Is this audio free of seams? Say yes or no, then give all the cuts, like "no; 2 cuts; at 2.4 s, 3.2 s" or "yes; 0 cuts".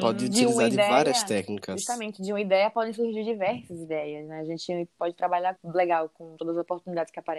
no; 1 cut; at 5.6 s